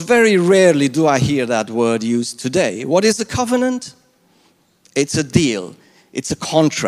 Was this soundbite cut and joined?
no; 0 cuts

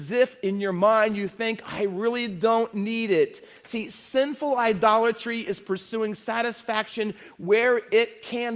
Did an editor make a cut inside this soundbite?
no; 0 cuts

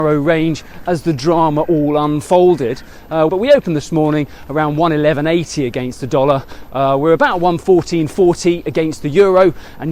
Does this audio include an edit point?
yes; 1 cut; at 3.3 s

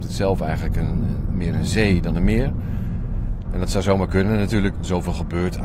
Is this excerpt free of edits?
no; 2 cuts; at 3.4 s, 4.7 s

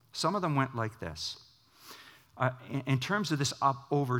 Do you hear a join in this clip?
no; 0 cuts

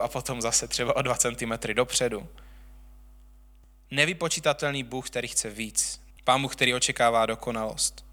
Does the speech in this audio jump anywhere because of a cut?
yes; 1 cut; at 6.1 s

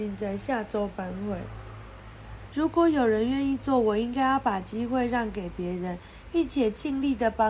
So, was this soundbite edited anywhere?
yes; 1 cut; at 2.5 s

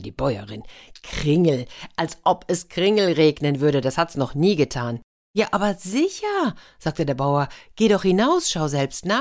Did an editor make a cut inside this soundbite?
no; 0 cuts

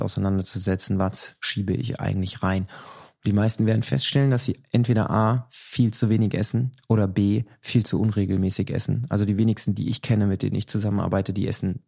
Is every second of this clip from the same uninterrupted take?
yes; 0 cuts

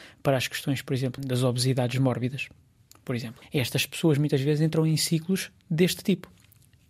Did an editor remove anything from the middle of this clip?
yes; 2 cuts; at 1.2 s, 3.4 s

